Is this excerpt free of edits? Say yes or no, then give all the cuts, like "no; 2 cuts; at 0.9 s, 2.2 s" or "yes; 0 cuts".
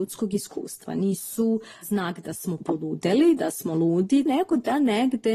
no; 1 cut; at 4.3 s